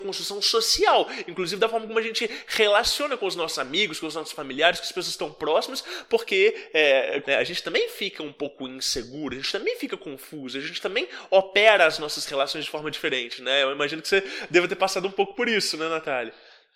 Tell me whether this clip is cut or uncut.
cut